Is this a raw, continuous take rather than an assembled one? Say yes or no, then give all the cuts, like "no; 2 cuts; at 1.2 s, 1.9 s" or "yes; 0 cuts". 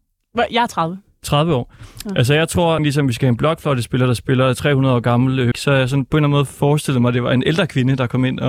no; 2 cuts; at 2.8 s, 5.5 s